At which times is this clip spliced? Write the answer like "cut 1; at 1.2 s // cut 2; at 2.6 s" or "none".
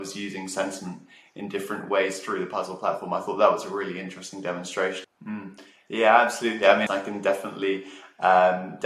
cut 1; at 5.0 s // cut 2; at 6.9 s